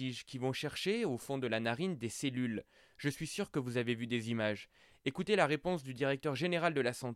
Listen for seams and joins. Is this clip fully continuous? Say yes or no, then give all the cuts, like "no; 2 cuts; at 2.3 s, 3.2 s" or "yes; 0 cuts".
yes; 0 cuts